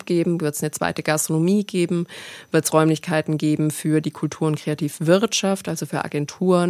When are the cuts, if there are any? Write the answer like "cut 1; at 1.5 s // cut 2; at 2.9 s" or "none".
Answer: none